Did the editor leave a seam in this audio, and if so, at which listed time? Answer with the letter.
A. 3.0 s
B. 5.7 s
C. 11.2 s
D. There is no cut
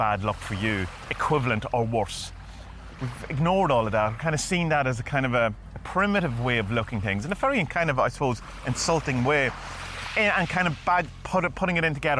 A